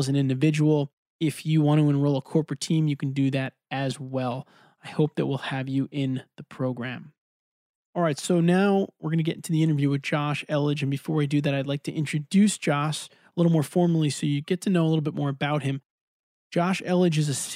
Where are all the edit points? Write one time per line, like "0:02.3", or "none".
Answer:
none

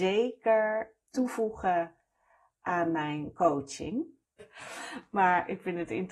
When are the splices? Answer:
0:04.4

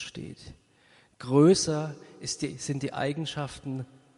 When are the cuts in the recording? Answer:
none

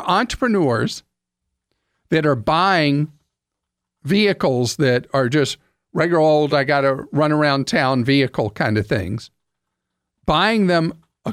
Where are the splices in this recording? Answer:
none

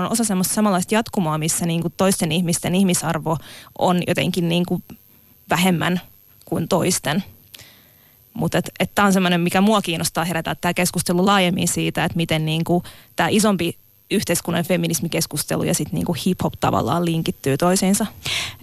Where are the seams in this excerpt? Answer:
none

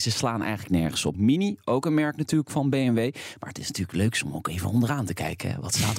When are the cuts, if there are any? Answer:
0:01.1

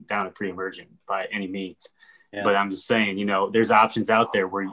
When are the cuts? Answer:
none

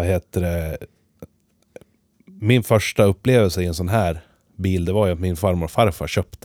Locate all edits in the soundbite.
none

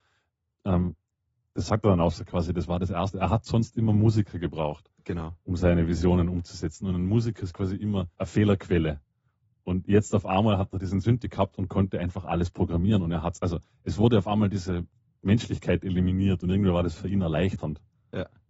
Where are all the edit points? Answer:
0:08.1

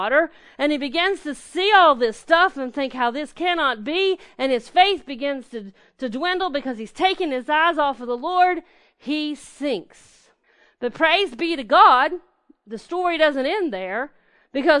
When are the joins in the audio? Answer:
none

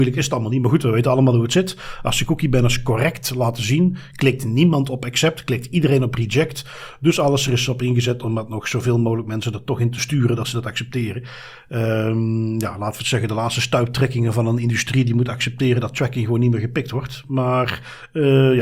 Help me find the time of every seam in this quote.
none

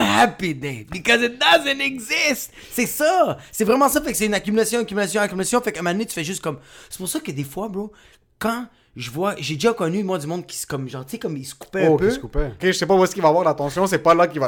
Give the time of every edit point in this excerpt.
0:12.6

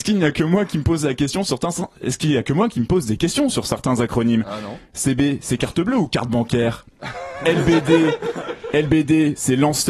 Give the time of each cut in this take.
none

